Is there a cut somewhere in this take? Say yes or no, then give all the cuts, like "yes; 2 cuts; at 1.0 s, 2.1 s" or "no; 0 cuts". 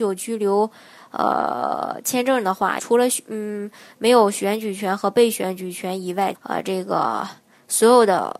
yes; 2 cuts; at 2.8 s, 6.3 s